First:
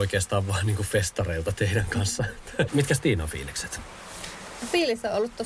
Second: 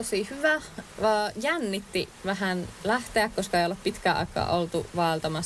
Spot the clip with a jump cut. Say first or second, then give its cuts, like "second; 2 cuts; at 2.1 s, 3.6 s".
first; 1 cut; at 2.7 s